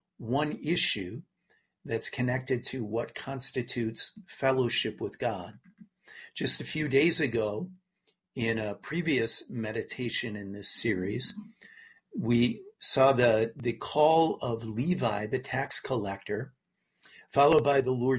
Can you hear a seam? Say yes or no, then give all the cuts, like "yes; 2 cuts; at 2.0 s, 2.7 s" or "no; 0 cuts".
no; 0 cuts